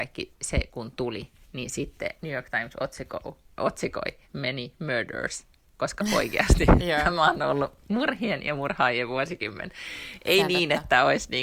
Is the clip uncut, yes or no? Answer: no